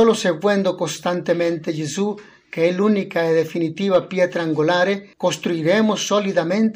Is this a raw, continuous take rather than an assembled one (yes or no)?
no